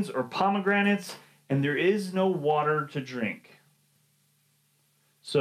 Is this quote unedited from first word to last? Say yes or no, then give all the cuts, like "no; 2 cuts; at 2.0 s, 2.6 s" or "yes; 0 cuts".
yes; 0 cuts